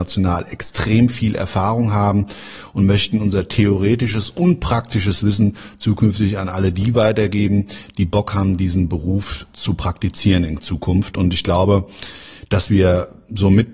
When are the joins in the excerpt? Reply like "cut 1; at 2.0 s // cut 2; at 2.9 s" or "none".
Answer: none